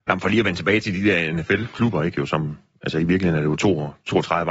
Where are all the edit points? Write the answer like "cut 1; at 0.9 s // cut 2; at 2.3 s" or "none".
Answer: none

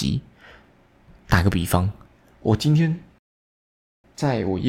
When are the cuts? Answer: none

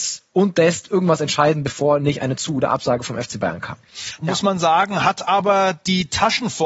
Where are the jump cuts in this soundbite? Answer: cut 1; at 4.2 s

